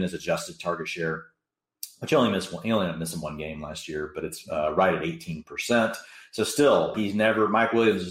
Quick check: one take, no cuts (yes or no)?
no